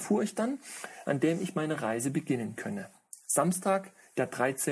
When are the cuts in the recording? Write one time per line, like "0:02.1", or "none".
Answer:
0:01.0